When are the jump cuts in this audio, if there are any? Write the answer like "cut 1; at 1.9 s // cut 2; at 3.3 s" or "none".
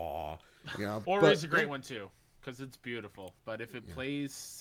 cut 1; at 1.0 s // cut 2; at 3.4 s